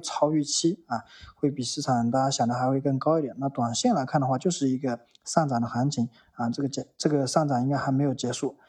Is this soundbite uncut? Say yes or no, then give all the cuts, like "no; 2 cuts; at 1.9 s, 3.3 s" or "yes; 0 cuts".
yes; 0 cuts